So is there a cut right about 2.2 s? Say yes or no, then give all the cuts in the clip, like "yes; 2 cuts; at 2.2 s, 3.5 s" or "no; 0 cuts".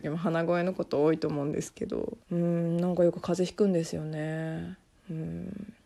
yes; 1 cut; at 2.2 s